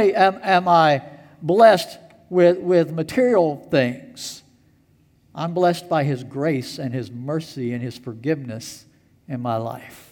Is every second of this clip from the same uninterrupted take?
yes; 0 cuts

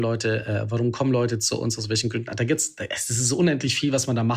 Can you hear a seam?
no; 0 cuts

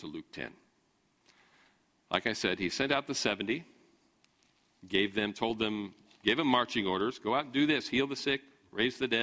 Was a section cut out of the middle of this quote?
no; 0 cuts

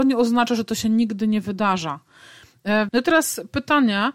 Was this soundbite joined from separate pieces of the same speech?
yes; 1 cut; at 2.9 s

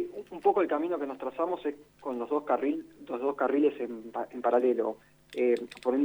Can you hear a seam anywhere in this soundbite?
no; 0 cuts

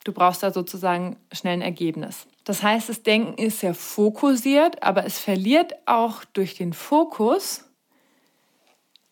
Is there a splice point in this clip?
no; 0 cuts

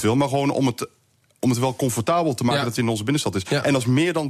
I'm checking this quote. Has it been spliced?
no; 0 cuts

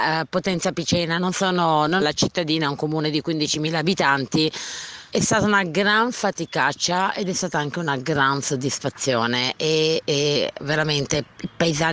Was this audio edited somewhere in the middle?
yes; 2 cuts; at 2.0 s, 5.1 s

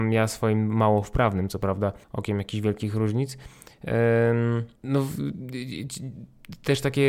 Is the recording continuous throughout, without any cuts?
no; 2 cuts; at 2.0 s, 4.8 s

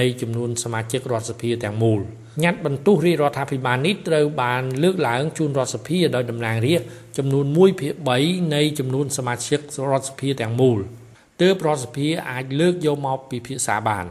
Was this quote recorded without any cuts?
no; 1 cut; at 2.3 s

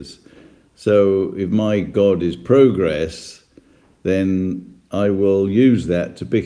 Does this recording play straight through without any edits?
yes; 0 cuts

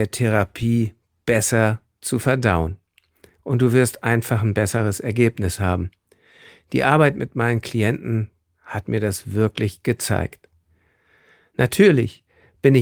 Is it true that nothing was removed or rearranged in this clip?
yes; 0 cuts

